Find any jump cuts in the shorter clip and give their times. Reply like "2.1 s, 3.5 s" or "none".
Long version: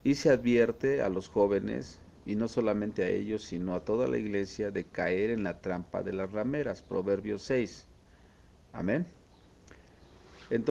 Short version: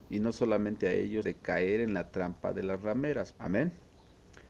1.2 s, 3.3 s

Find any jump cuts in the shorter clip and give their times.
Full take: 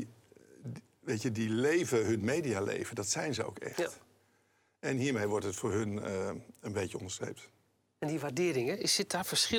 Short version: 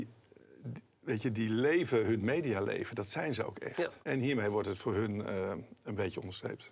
4.0 s

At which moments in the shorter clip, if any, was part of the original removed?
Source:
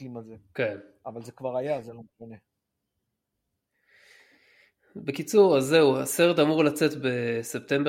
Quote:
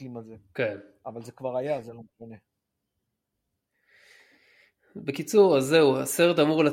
none

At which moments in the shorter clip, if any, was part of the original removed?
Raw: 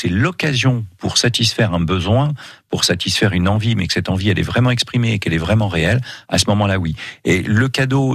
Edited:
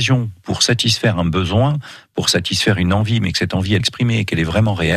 3.8 s

